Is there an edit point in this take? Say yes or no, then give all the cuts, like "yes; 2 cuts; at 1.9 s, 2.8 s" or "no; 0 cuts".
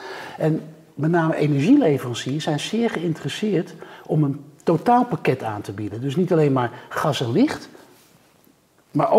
no; 0 cuts